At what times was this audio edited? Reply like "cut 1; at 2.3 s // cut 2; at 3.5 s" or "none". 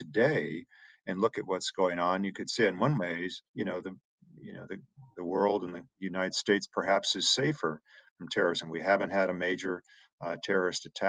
cut 1; at 3.5 s